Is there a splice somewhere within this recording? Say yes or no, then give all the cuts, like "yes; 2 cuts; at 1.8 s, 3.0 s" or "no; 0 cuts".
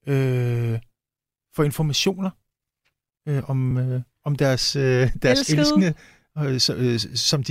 no; 0 cuts